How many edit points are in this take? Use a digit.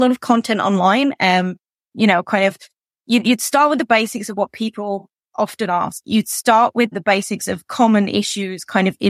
1